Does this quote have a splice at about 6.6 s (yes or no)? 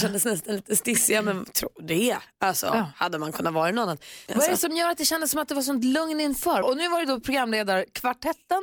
yes